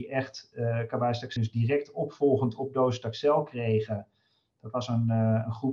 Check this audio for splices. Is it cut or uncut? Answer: cut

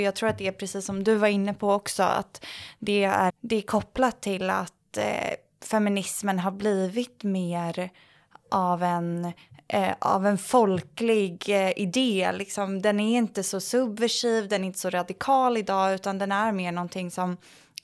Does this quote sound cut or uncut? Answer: cut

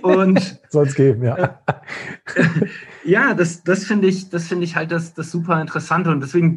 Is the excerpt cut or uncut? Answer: uncut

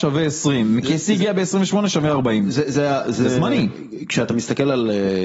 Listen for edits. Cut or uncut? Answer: uncut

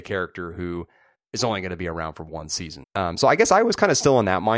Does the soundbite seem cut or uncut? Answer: cut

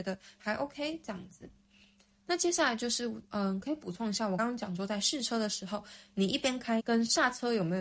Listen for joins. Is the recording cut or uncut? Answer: cut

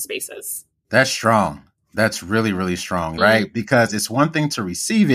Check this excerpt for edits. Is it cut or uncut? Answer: cut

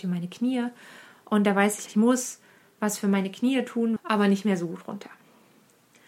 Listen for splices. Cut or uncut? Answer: cut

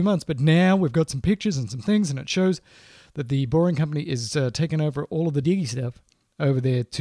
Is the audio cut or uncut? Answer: cut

